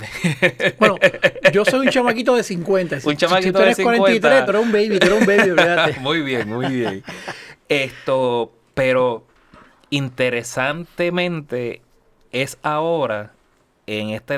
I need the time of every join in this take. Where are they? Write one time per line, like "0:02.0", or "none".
none